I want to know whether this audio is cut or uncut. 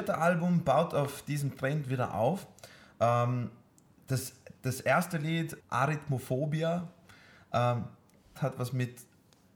cut